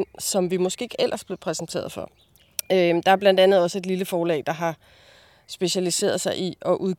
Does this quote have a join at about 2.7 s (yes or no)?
no